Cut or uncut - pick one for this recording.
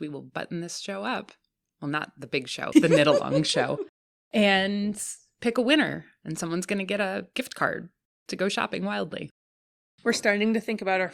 cut